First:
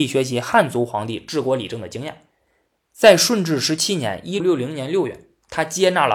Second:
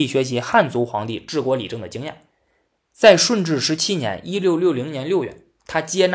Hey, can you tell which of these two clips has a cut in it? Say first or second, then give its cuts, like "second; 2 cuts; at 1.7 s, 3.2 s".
first; 1 cut; at 4.4 s